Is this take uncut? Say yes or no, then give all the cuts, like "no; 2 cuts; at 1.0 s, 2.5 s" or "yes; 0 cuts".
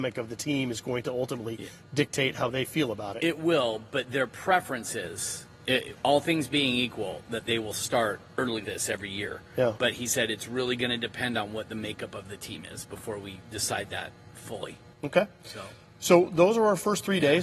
no; 1 cut; at 8.6 s